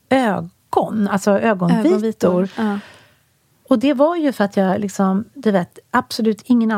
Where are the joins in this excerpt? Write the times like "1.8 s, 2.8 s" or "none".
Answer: none